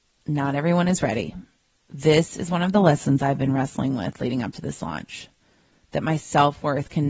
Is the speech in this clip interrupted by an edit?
no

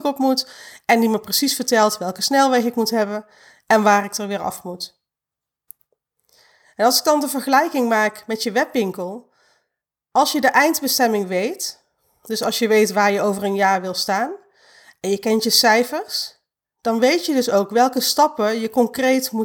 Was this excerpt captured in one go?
yes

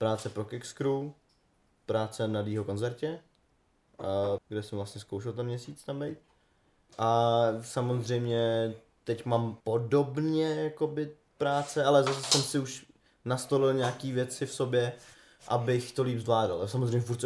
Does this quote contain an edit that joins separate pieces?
yes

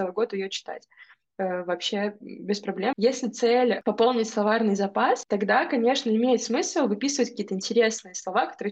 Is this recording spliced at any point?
yes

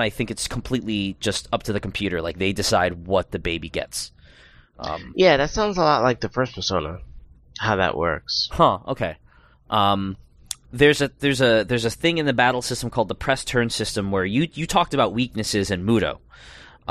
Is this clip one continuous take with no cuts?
yes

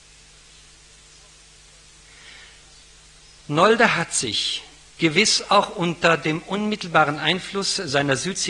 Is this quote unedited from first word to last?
yes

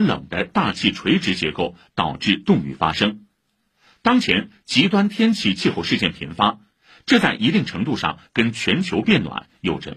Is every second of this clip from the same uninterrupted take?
yes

